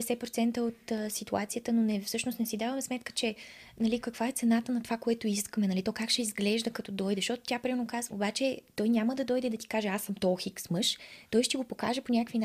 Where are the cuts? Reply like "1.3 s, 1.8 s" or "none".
4.0 s, 8.1 s